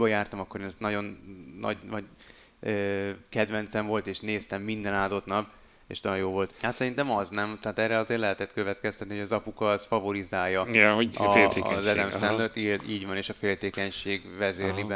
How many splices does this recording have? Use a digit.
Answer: 1